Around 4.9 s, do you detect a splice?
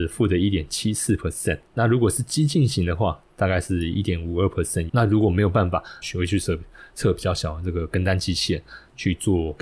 yes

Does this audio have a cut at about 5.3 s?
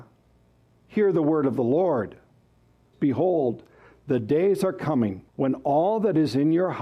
yes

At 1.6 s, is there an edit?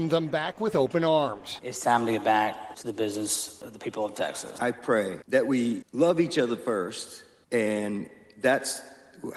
yes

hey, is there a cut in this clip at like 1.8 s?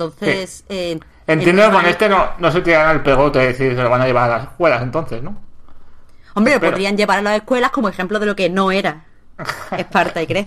no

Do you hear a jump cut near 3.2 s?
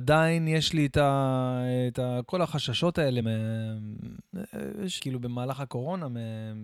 yes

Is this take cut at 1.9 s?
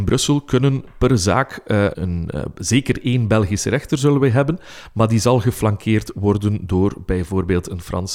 yes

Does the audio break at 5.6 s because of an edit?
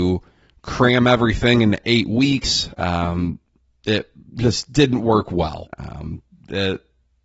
yes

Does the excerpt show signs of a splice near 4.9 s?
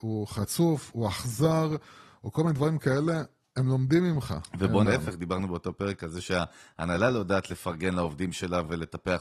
yes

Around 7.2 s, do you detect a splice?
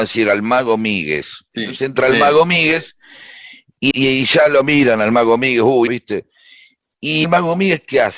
yes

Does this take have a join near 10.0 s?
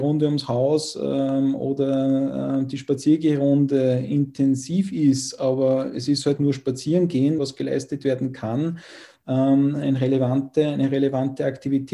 no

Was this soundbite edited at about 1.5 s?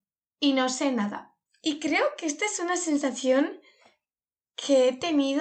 yes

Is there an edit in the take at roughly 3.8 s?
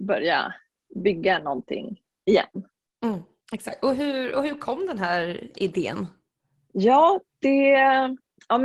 no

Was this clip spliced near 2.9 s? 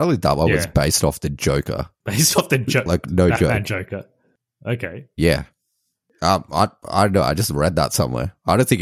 yes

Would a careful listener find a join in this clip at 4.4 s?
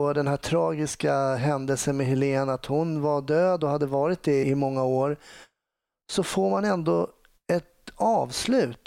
yes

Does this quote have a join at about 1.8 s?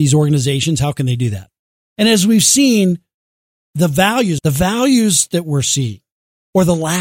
yes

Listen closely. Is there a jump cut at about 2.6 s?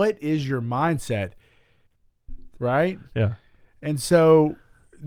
yes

